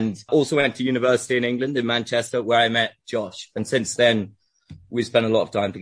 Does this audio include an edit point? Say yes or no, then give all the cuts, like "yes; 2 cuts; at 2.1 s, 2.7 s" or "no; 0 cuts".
no; 0 cuts